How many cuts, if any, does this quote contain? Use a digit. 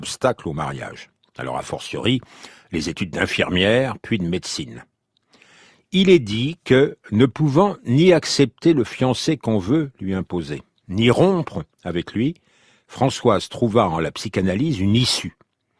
0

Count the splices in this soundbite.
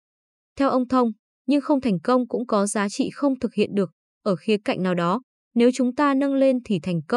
1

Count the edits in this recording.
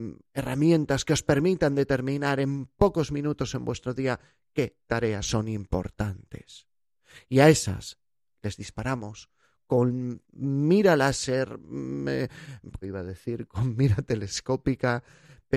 1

